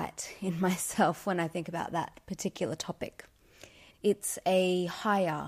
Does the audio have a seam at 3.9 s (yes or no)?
yes